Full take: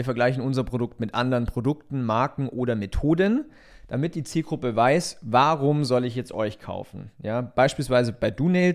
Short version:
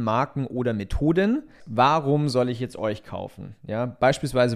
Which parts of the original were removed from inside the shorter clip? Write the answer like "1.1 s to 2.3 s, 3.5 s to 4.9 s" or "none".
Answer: 3.6 s to 5.2 s